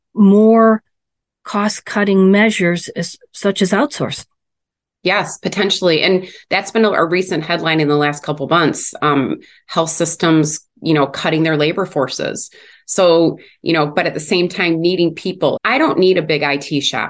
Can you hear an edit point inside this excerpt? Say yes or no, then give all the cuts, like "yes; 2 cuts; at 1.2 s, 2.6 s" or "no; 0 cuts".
yes; 2 cuts; at 13.9 s, 15.6 s